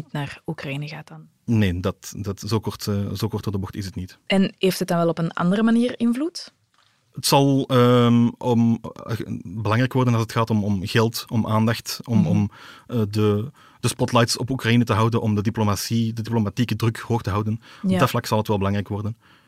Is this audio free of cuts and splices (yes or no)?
yes